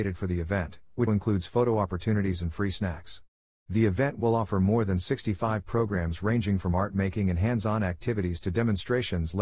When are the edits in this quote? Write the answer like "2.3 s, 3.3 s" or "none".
1.1 s